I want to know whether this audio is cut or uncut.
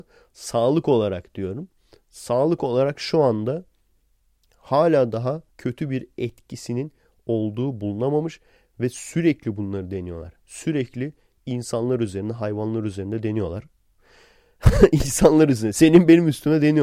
cut